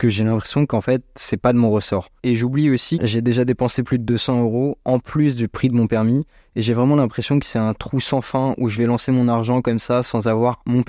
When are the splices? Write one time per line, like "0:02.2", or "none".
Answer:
0:02.9